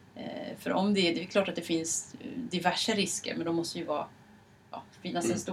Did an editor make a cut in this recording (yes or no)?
no